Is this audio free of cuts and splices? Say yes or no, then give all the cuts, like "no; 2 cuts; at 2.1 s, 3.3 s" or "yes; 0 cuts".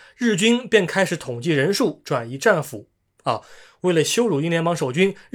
yes; 0 cuts